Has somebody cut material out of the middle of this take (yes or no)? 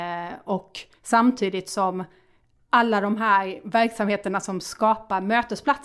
no